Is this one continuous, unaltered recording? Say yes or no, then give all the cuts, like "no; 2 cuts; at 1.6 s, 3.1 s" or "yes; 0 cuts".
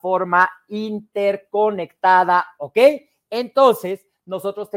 no; 1 cut; at 2.6 s